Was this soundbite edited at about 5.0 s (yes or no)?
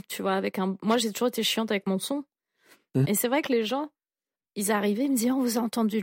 no